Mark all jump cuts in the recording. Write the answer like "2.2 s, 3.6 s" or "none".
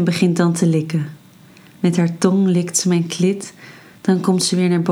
none